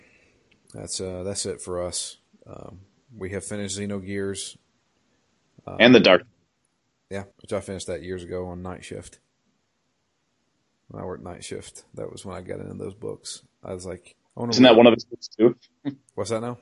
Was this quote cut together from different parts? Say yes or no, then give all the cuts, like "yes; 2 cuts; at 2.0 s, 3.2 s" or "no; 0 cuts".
yes; 2 cuts; at 7.3 s, 14.2 s